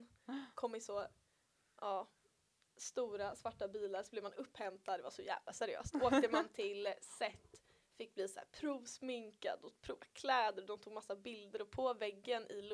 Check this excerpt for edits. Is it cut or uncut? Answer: uncut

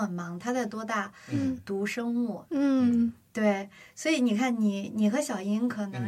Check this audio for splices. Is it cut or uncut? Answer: cut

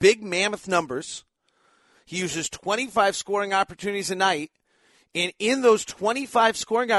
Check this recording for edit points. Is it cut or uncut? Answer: uncut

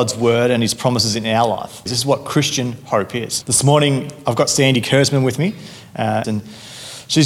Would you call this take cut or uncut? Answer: cut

